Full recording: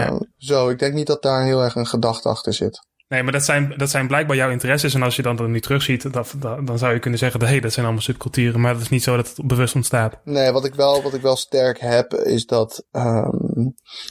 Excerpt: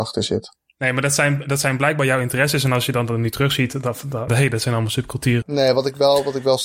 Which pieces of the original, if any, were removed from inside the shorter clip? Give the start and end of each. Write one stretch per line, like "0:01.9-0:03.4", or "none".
0:06.6-0:07.4
0:08.5-0:10.2